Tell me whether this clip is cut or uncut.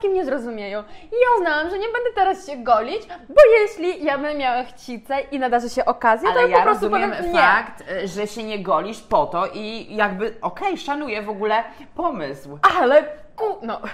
uncut